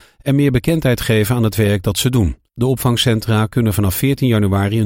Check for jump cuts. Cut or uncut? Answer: cut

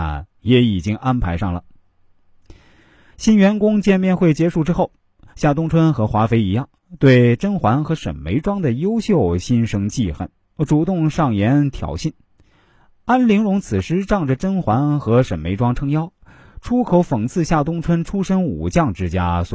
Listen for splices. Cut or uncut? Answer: uncut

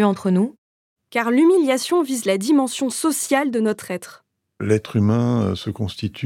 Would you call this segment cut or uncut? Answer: cut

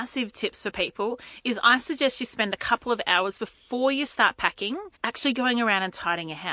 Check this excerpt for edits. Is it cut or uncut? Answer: cut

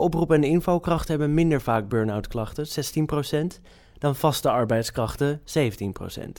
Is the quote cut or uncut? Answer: uncut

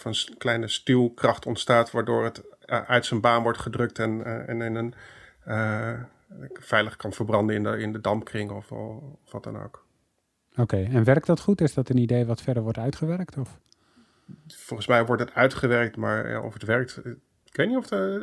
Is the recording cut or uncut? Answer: uncut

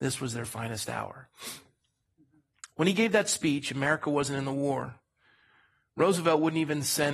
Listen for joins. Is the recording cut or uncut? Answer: uncut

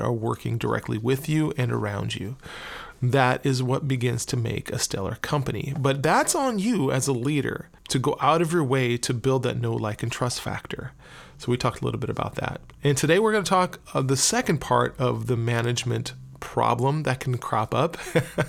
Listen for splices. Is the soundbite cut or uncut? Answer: cut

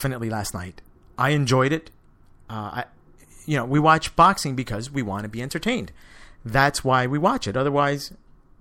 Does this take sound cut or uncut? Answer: uncut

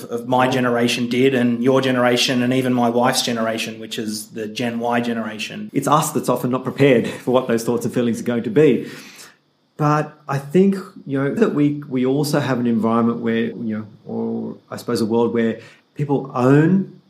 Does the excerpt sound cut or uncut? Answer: cut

